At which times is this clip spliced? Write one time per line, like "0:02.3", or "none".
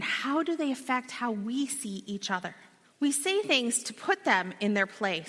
0:02.8

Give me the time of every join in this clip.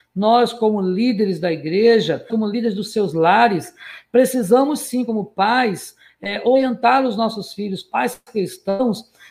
0:02.3

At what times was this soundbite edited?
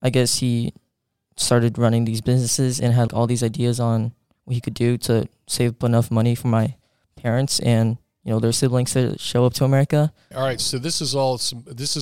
0:03.1
0:10.3

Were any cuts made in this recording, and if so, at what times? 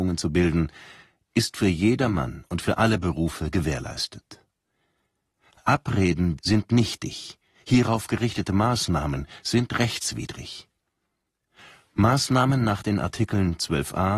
0:06.4

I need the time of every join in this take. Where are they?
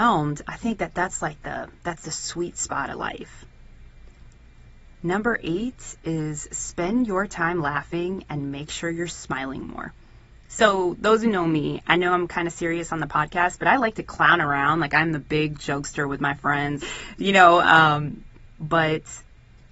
0:16.8

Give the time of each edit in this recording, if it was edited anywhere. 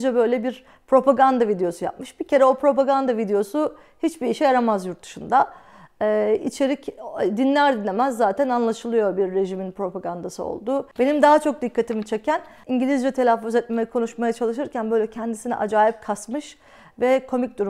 none

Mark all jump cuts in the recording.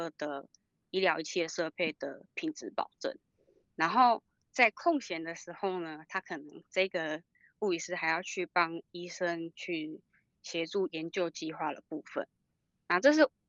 none

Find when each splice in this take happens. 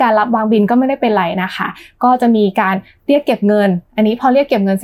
none

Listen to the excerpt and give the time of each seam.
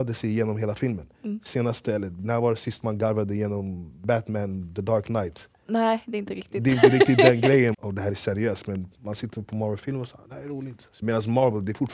0:07.7
0:11.0

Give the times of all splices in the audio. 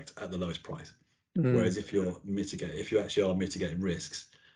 none

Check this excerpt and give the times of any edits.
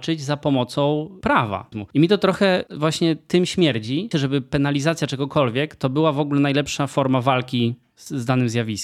0:01.7
0:04.1

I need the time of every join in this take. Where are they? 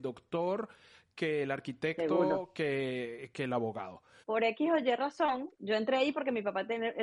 0:04.2
0:05.6

